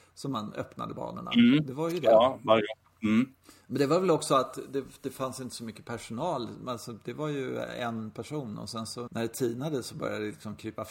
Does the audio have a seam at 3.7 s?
no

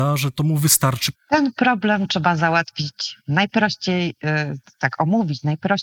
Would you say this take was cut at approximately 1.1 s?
yes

